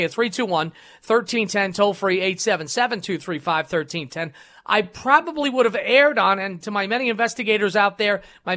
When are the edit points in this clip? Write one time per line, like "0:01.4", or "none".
none